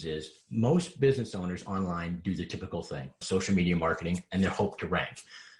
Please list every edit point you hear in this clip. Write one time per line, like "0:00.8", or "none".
0:03.2